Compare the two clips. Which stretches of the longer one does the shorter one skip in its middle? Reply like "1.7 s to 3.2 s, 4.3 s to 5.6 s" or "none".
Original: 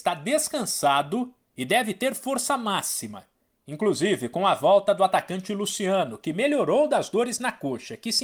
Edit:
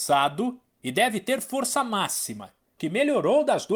3.5 s to 6.2 s